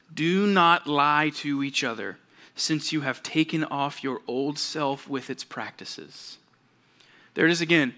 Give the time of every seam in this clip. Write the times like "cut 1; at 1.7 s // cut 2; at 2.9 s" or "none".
none